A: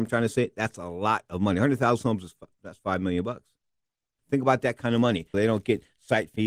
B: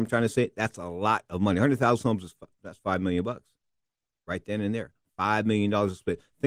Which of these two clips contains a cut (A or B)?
A